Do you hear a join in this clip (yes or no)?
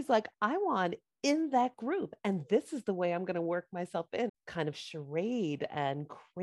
yes